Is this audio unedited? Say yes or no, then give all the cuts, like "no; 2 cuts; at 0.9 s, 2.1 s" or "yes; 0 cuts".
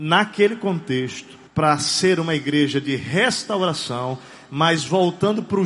no; 1 cut; at 1.5 s